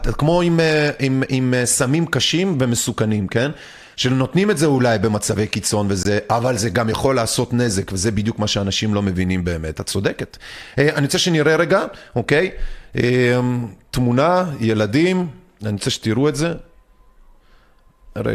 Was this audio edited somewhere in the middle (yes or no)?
no